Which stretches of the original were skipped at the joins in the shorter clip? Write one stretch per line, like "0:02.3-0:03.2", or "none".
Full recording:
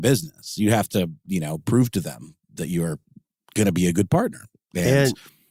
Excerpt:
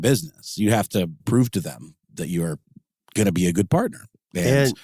0:01.2-0:01.6